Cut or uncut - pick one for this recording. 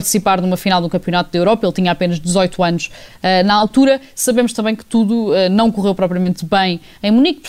uncut